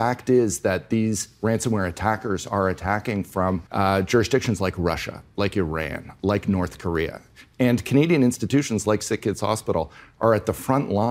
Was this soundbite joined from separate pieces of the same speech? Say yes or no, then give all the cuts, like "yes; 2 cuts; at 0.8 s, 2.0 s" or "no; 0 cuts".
yes; 1 cut; at 3.7 s